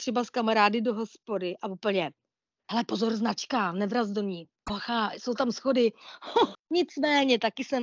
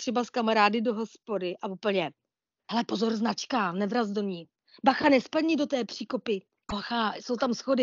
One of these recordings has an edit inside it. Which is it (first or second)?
first